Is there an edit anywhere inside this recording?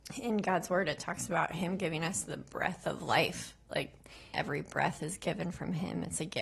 yes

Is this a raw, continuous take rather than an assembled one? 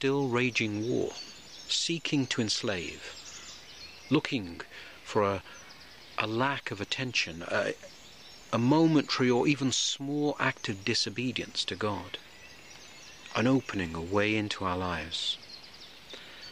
yes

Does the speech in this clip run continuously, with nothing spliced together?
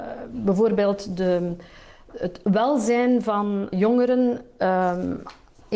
no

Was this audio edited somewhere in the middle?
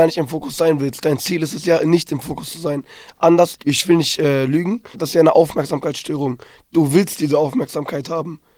yes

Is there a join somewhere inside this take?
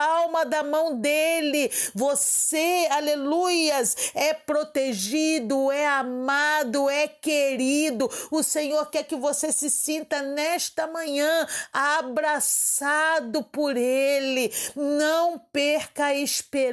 no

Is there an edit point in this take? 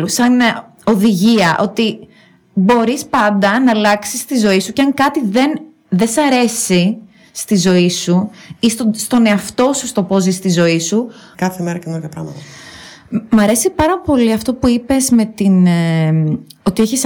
yes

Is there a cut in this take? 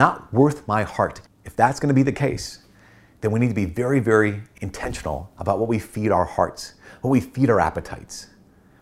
yes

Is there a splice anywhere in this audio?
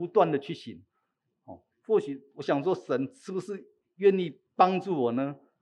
yes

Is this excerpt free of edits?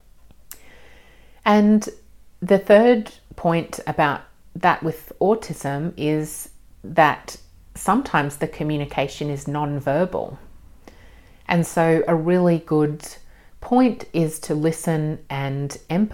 yes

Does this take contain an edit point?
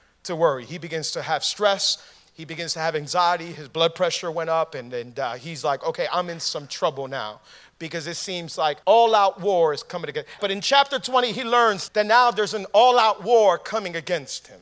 yes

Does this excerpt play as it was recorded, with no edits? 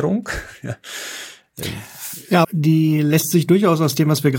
no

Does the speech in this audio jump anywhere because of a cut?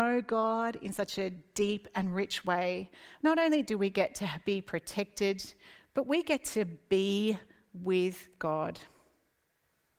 no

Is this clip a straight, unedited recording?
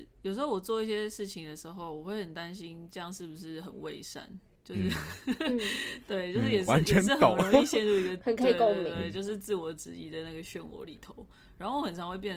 yes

